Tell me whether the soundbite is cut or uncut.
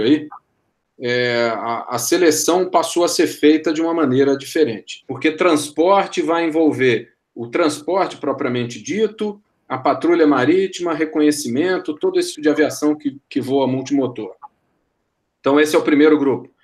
cut